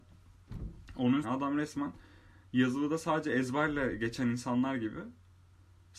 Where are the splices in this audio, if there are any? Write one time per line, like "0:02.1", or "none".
0:01.2